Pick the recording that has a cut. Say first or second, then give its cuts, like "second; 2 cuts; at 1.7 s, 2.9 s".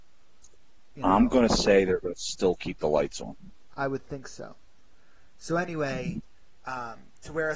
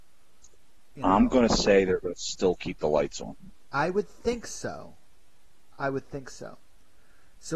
first; 1 cut; at 3.7 s